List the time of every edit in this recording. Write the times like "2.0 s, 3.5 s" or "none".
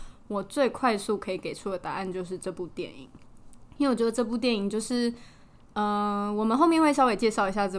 none

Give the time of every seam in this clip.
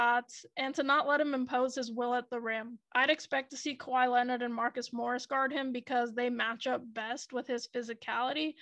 none

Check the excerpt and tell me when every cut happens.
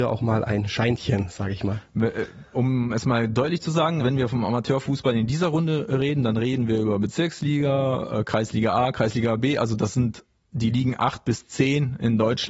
4.0 s

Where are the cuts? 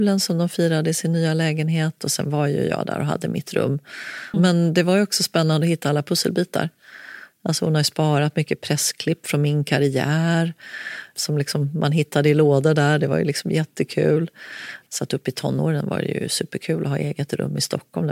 4.3 s, 14.9 s

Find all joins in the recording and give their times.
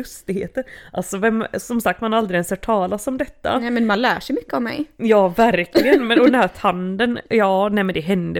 none

